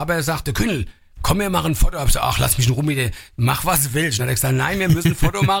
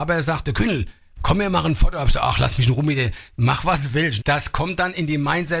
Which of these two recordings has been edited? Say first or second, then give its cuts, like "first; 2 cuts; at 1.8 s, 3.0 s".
second; 1 cut; at 4.2 s